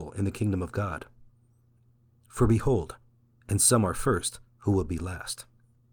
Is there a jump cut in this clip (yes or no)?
yes